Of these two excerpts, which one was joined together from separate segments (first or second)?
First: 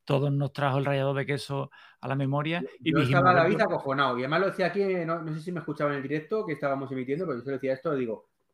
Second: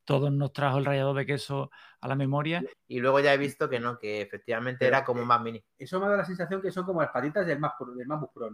second